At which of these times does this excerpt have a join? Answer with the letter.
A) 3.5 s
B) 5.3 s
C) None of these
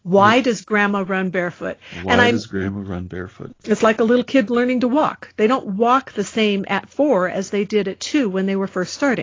A